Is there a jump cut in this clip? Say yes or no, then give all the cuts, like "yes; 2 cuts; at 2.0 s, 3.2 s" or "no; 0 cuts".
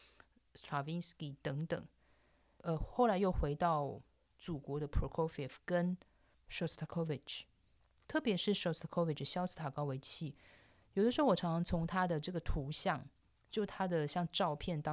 no; 0 cuts